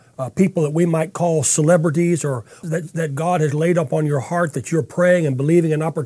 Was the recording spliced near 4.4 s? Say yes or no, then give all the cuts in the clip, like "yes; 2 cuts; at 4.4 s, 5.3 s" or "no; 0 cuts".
no; 1 cut; at 2.6 s